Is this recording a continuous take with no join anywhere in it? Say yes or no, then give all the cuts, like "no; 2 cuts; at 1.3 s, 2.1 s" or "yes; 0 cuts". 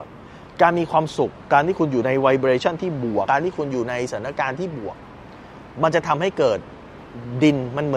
no; 1 cut; at 3.3 s